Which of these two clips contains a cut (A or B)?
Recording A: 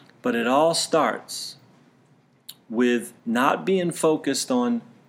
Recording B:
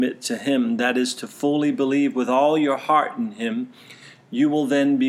A